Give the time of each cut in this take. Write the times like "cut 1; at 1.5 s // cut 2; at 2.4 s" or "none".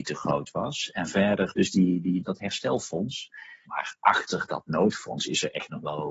cut 1; at 2.2 s // cut 2; at 3.6 s